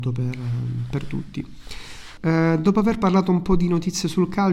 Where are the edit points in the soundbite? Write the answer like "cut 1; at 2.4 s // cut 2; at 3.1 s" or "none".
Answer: cut 1; at 2.2 s